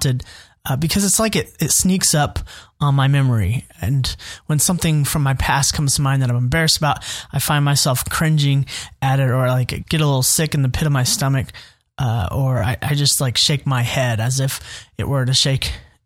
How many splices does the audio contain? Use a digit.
0